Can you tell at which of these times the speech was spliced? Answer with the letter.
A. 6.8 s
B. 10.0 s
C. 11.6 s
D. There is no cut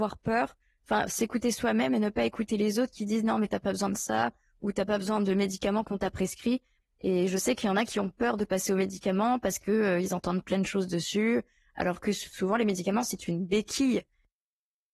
A